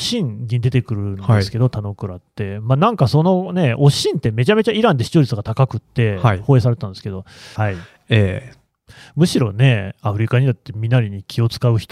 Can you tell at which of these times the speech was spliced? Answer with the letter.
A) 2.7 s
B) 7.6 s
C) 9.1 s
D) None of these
B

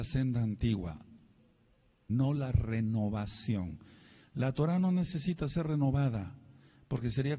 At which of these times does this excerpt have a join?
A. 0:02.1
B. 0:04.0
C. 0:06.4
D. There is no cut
A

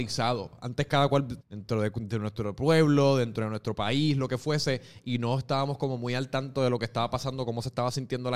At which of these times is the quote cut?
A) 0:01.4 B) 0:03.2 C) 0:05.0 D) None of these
A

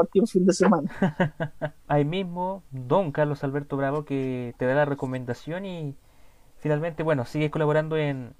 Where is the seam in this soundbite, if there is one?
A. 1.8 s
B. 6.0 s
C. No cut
A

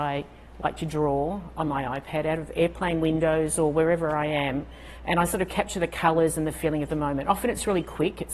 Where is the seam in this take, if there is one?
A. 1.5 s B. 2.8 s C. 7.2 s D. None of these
D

